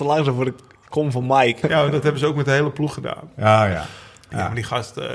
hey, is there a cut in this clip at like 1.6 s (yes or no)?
yes